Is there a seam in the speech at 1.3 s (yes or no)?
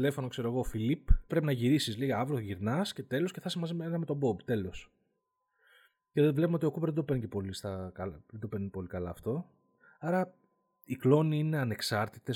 yes